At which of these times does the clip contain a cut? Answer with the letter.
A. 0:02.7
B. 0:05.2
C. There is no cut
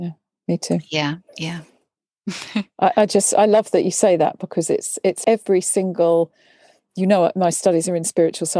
B